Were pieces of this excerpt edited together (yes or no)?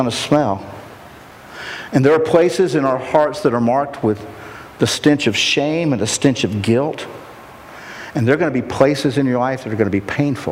yes